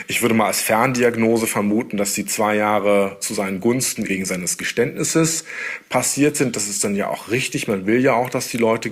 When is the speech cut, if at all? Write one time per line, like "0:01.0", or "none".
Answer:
0:04.1